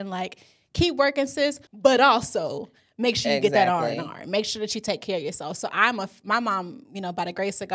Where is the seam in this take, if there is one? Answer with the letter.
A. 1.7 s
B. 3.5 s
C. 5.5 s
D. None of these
A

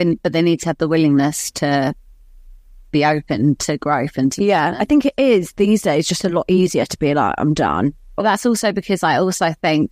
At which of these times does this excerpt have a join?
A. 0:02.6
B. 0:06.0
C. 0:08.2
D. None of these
C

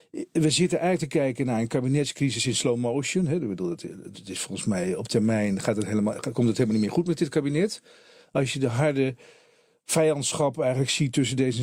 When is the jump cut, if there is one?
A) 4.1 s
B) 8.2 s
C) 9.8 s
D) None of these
A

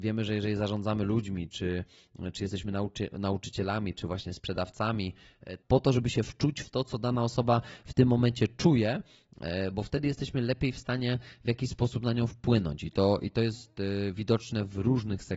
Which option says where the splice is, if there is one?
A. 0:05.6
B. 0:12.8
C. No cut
A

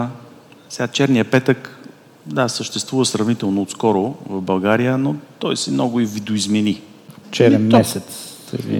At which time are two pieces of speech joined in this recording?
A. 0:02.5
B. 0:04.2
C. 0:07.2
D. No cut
C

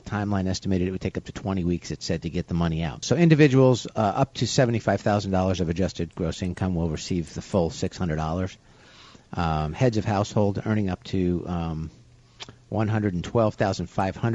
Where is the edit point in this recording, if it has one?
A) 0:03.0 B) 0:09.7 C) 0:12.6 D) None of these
A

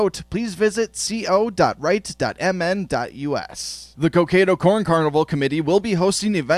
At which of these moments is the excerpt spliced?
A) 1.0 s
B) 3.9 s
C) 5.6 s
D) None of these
B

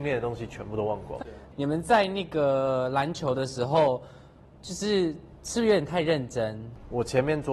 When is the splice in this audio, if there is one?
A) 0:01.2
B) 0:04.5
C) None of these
A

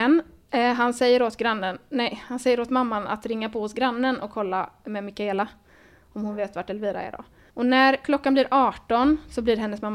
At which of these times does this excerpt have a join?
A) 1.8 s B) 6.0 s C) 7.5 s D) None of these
C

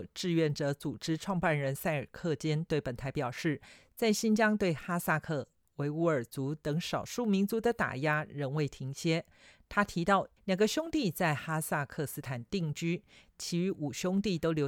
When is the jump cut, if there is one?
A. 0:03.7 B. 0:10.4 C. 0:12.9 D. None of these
B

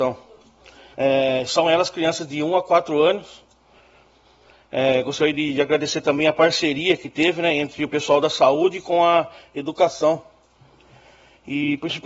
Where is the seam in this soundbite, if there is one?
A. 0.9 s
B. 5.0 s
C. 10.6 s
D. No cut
A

